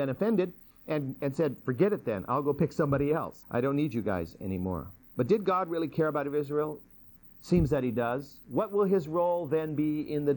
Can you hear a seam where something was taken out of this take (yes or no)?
yes